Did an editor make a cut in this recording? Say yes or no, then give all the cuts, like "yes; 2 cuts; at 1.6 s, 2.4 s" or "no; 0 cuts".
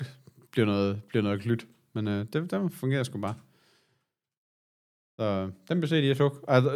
no; 0 cuts